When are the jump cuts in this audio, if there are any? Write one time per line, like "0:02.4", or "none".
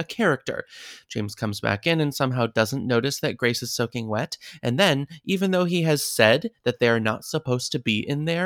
none